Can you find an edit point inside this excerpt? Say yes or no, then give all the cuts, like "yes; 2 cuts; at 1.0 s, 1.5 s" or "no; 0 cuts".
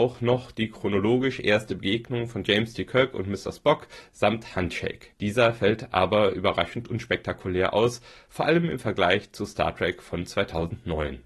yes; 1 cut; at 5.1 s